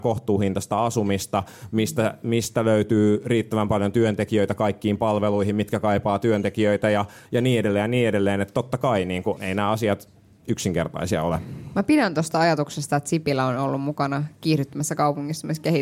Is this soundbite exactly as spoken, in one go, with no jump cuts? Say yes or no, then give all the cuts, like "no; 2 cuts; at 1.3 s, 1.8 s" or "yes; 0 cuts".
no; 1 cut; at 9.4 s